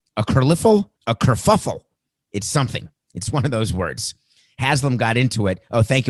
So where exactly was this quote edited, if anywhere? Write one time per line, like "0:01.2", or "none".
0:01.0